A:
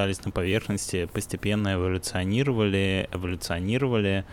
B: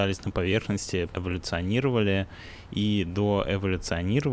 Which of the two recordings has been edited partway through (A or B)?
B